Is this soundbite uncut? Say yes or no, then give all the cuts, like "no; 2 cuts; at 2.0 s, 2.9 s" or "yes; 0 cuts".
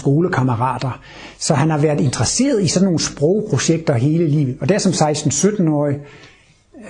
yes; 0 cuts